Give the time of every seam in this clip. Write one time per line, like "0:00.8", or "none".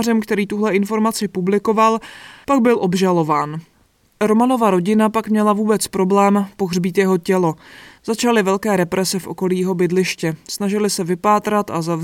none